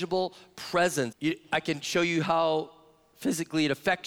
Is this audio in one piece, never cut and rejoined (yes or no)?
no